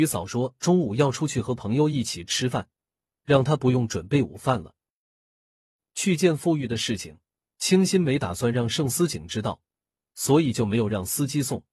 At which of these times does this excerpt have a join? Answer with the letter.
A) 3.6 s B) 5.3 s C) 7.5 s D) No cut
D